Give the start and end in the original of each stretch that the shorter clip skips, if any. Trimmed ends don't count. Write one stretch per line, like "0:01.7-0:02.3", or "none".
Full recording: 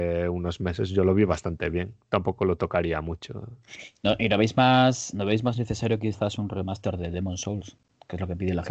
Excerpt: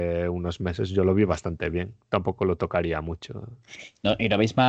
none

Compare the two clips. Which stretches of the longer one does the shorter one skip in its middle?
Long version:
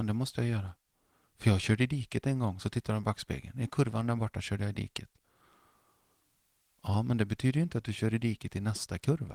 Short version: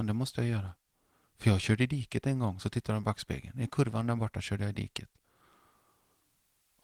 none

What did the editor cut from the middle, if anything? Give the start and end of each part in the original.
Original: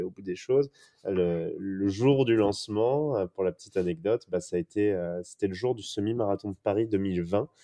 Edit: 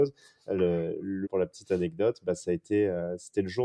0:01.8-0:03.3

